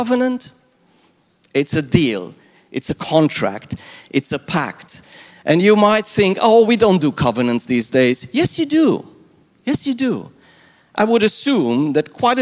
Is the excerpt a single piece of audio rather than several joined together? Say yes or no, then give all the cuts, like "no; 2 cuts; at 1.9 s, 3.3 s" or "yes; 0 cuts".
yes; 0 cuts